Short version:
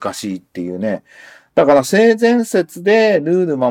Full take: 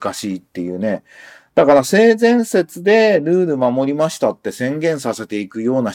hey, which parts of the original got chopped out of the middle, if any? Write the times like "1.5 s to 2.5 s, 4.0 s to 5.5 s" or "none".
none